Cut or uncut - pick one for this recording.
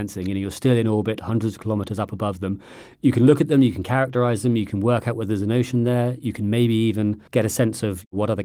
cut